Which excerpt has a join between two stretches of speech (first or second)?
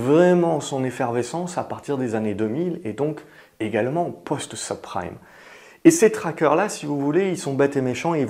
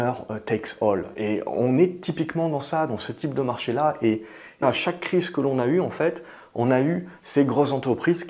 second